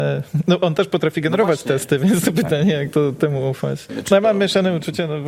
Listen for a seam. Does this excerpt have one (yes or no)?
yes